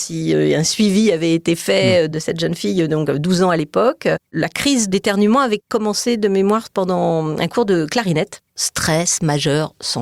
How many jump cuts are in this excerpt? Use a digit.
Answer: 0